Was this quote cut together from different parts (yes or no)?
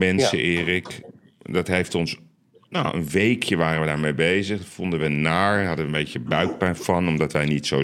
no